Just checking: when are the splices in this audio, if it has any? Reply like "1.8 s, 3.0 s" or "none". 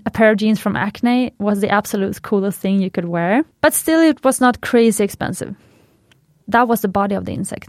1.4 s, 3.5 s, 6.4 s